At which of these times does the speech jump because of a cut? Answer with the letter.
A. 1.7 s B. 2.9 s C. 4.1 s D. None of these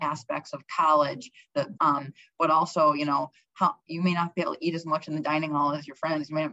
A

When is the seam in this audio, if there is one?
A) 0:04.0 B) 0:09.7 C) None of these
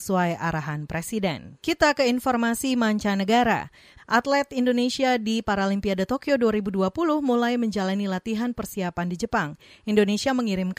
A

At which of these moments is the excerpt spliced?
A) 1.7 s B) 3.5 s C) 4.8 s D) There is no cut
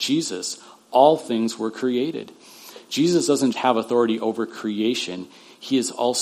B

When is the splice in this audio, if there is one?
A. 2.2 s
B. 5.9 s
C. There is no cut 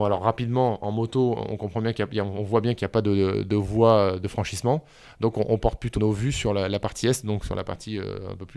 B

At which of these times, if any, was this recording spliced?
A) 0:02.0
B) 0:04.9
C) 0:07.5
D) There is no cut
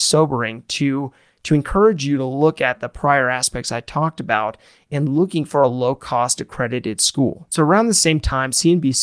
B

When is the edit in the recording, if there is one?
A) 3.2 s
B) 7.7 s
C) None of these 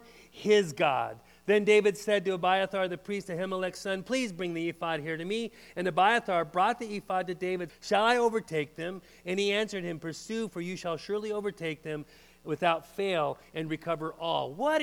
B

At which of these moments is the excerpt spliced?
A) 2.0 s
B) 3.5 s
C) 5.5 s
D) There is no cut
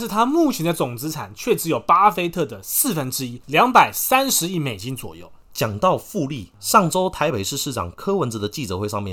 C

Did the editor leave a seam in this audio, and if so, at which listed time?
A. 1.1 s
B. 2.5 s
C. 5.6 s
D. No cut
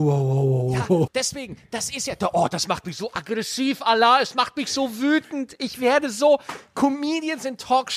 A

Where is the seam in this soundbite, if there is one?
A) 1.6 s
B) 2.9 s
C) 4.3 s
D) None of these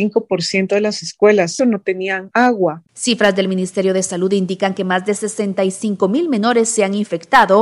A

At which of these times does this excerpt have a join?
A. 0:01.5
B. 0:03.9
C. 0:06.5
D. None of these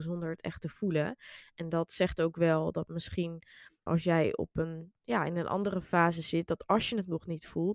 B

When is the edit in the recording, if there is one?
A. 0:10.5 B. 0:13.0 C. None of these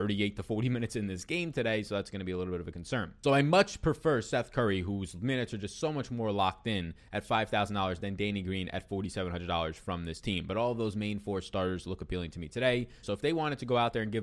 B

